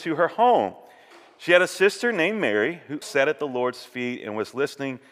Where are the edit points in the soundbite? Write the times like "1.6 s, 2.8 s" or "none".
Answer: 3.0 s